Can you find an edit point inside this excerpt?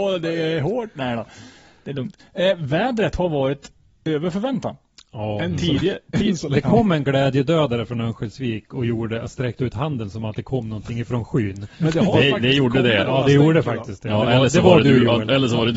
no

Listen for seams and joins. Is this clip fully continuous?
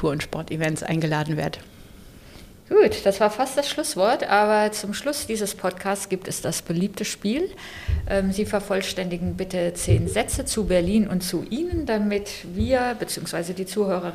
yes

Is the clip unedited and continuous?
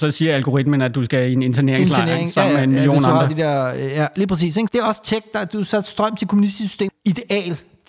no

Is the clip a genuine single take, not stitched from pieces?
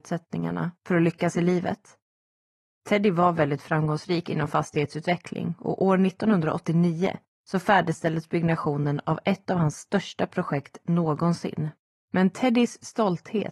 no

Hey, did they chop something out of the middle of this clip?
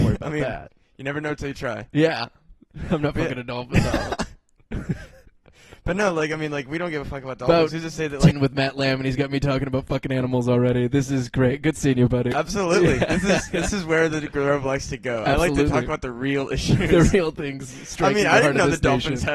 yes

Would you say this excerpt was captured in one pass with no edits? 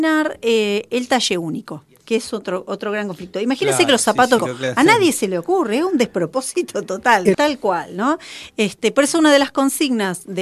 no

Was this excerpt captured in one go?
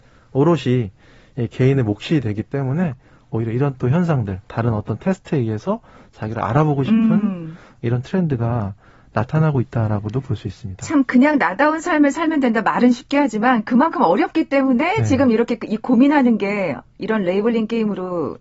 yes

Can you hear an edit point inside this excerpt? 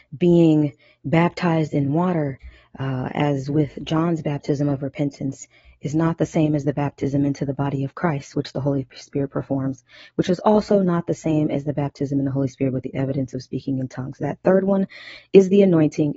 no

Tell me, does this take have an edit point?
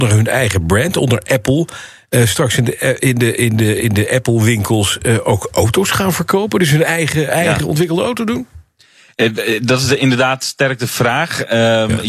no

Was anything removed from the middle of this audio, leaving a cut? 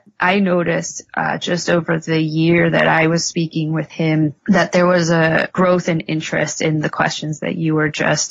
yes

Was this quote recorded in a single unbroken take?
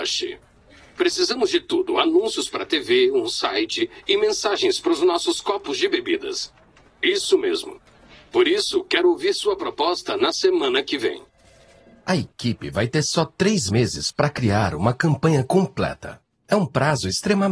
no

